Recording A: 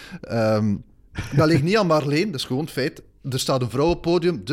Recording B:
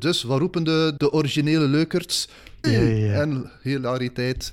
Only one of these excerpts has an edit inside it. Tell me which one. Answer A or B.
B